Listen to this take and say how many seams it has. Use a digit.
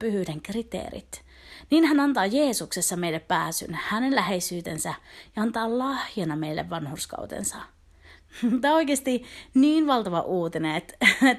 0